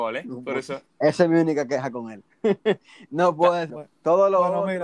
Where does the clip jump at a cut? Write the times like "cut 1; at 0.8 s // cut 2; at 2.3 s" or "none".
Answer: cut 1; at 3.7 s